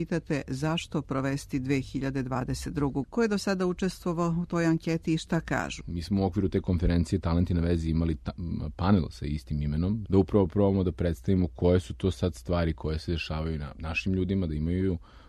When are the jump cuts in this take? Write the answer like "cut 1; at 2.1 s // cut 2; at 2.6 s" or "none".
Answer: cut 1; at 3.0 s // cut 2; at 5.8 s // cut 3; at 10.1 s